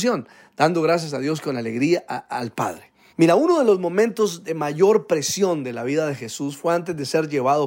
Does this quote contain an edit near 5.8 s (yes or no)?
no